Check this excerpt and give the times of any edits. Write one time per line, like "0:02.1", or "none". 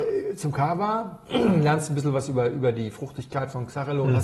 none